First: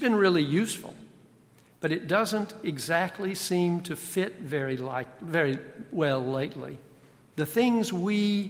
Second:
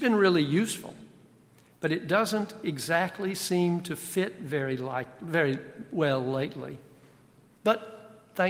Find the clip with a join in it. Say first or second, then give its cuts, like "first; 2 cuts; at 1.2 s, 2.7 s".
first; 1 cut; at 7.3 s